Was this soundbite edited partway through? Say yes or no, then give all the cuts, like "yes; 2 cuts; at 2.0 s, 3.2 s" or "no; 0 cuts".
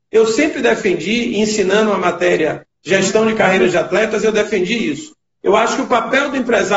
no; 0 cuts